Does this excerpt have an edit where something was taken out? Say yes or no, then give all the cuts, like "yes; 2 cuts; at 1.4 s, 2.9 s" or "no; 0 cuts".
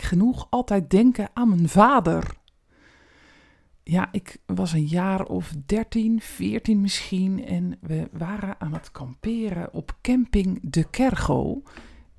no; 0 cuts